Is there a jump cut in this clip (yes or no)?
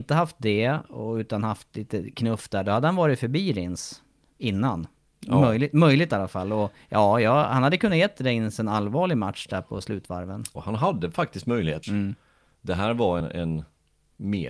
yes